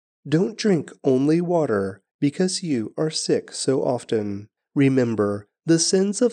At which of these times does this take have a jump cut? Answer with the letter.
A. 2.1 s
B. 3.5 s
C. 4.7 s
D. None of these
A